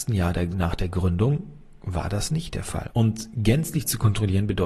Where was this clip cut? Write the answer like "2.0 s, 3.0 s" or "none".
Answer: 2.9 s